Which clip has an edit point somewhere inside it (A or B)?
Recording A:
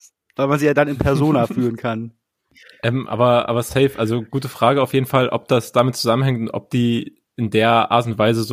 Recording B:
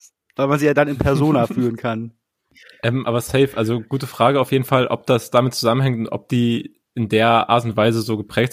B